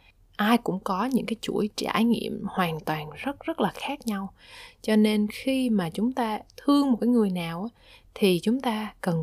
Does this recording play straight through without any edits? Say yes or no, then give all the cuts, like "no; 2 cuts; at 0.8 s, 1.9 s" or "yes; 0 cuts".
no; 1 cut; at 3.4 s